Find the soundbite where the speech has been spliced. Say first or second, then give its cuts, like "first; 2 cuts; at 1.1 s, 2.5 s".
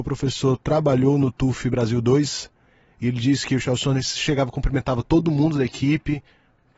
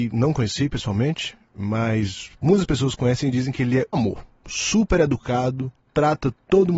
second; 1 cut; at 3.9 s